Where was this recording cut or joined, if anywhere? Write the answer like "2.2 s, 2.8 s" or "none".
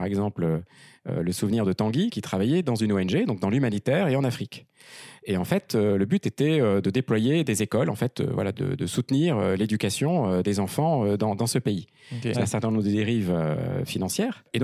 8.5 s, 12.3 s